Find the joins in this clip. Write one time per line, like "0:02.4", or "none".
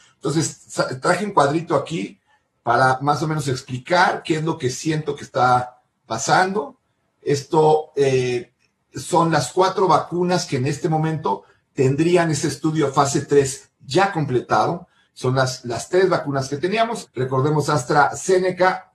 0:15.1
0:17.1